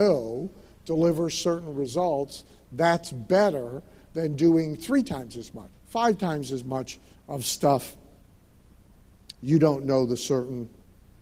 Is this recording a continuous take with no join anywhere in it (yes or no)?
no